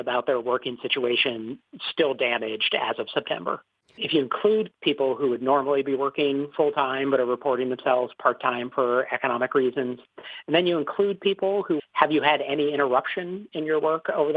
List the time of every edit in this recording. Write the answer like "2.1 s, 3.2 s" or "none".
4.0 s, 11.8 s